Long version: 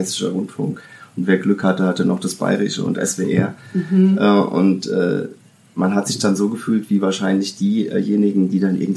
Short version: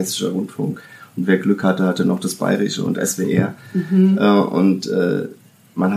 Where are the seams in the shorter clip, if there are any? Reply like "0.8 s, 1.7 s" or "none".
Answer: none